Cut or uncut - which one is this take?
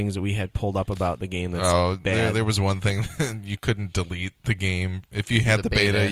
uncut